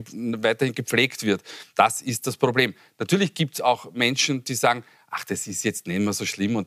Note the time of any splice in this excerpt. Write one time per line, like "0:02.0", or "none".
none